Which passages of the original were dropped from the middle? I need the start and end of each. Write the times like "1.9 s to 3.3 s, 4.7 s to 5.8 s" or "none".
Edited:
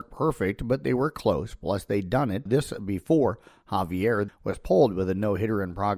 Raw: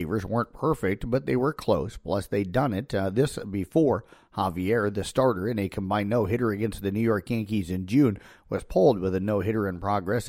2.9 s to 3.1 s, 4.9 s to 8.3 s

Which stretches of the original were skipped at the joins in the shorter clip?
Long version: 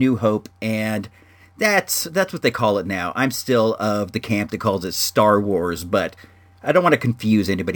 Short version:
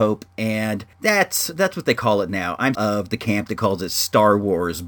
1.2 s to 1.5 s, 3.3 s to 3.8 s

